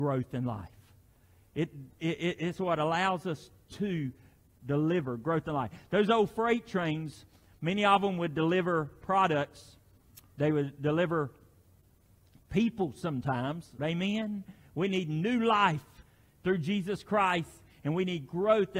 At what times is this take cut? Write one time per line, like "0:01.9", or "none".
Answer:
0:13.8